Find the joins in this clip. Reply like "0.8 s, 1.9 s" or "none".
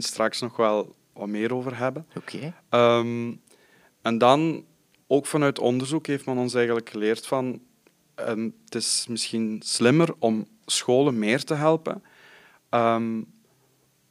none